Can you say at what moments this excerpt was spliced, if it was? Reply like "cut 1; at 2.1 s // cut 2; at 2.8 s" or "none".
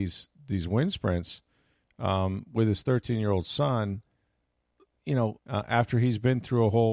cut 1; at 5.4 s